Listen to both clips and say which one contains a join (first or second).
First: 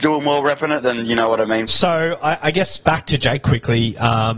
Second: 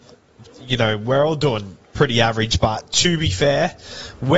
first